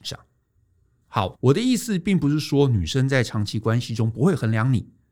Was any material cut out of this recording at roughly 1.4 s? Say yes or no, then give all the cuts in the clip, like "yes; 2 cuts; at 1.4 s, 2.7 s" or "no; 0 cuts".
yes; 1 cut; at 1.4 s